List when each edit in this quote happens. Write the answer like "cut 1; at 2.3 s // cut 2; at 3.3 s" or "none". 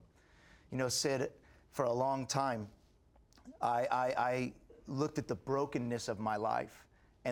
none